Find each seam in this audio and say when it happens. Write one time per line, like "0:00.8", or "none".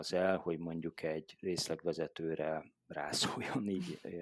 none